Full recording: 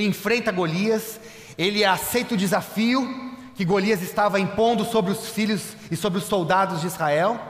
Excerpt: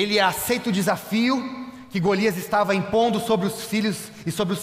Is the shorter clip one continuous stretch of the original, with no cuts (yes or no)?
yes